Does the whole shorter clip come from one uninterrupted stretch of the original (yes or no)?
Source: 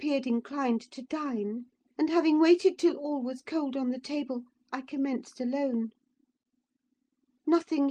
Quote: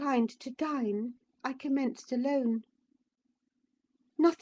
no